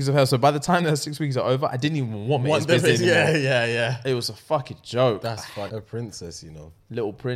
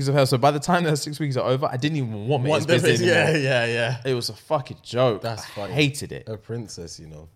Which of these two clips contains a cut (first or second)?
first